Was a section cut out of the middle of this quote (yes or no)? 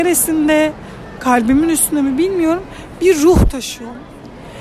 yes